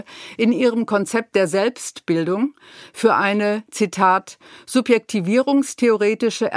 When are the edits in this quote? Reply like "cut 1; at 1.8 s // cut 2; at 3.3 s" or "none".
none